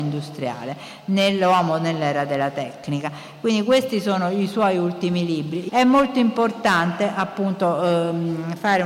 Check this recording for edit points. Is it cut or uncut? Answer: cut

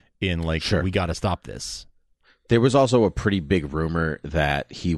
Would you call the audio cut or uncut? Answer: uncut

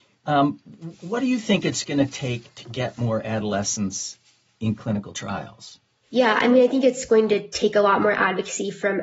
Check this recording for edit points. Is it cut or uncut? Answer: uncut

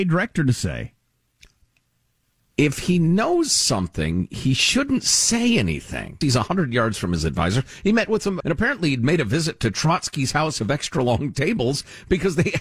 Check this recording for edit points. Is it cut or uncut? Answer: cut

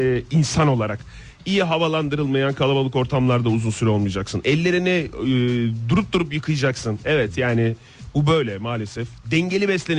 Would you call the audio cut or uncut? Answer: uncut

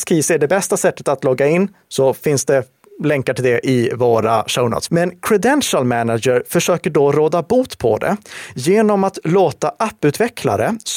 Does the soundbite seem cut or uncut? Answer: cut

